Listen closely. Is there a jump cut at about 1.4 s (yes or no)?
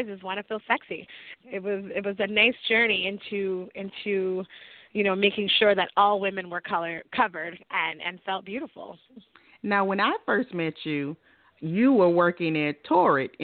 yes